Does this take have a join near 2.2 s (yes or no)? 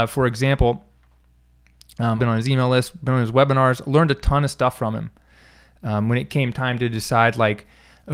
yes